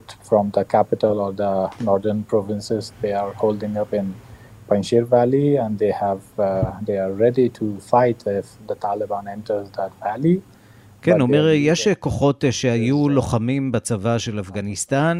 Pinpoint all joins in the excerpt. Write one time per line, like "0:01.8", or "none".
none